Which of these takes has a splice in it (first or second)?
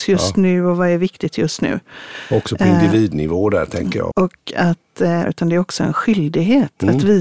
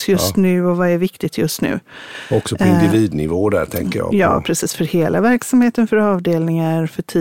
first